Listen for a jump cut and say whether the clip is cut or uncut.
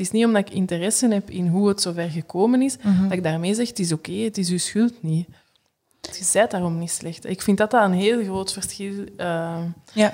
cut